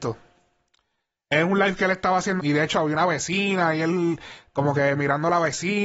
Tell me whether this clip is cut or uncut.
cut